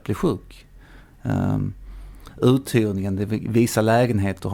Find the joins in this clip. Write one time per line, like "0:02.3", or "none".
0:02.3